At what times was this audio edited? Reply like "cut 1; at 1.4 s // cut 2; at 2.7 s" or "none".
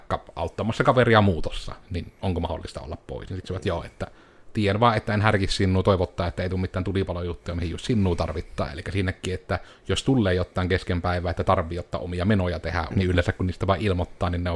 cut 1; at 8.7 s // cut 2; at 12.9 s